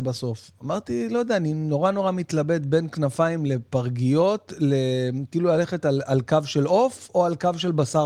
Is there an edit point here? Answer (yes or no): no